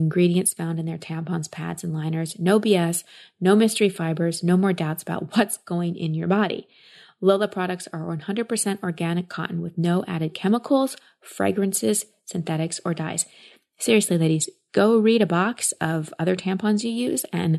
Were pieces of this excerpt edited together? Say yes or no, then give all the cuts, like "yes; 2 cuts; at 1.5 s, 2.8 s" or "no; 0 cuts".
no; 0 cuts